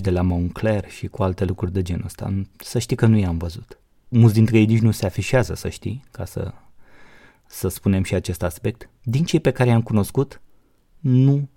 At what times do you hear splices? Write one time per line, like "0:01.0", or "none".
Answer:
0:04.1
0:09.0